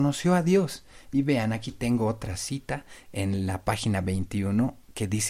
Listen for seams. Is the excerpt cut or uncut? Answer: uncut